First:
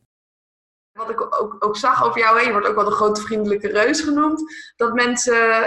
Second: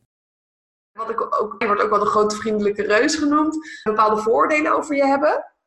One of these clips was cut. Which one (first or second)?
second